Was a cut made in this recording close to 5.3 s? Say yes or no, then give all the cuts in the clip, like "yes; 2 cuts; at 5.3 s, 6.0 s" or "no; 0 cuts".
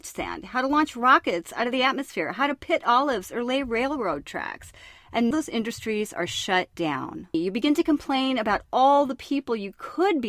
yes; 2 cuts; at 5.3 s, 7.3 s